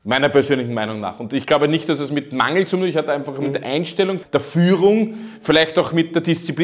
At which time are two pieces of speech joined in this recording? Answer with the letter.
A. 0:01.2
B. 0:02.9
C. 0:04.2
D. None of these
C